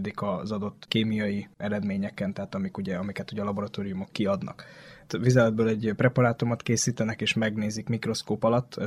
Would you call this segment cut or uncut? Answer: uncut